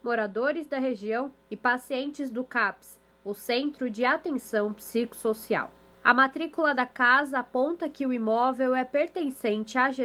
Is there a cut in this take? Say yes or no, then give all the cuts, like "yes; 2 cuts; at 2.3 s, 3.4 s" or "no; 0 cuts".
yes; 2 cuts; at 1.4 s, 5.9 s